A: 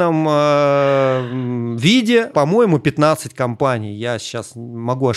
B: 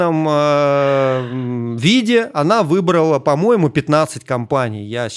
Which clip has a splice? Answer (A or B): A